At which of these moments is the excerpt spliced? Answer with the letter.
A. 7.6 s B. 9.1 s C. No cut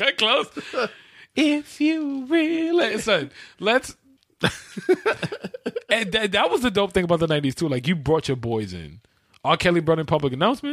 C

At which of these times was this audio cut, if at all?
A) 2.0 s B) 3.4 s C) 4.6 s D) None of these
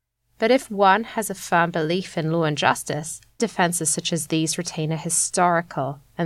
B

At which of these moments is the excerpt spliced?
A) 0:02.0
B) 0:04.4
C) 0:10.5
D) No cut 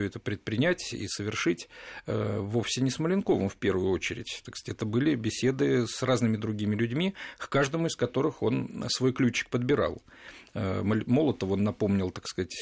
D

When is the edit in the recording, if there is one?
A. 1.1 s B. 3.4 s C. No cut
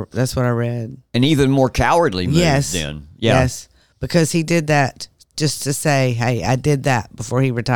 A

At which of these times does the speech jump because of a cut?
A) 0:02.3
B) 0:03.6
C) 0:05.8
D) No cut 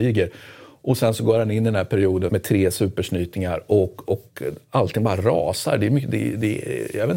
A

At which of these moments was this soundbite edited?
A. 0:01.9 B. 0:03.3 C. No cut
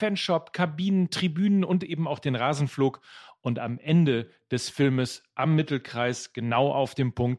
C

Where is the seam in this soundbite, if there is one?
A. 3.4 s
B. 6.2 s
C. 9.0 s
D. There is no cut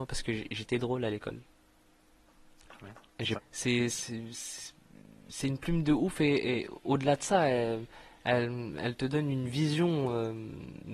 A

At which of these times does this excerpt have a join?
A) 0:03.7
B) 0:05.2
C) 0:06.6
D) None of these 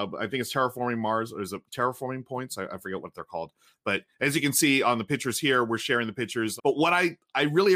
C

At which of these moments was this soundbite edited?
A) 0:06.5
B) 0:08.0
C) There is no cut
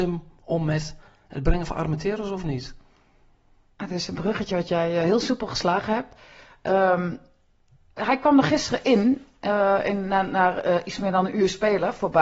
B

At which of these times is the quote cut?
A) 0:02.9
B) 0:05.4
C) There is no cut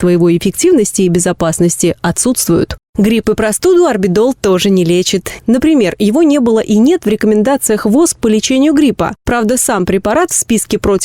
B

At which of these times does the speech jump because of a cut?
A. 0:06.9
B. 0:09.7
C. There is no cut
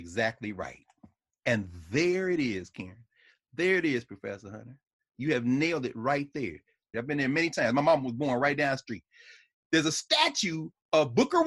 A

